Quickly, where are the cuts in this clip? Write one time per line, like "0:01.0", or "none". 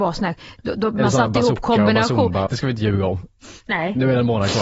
0:02.5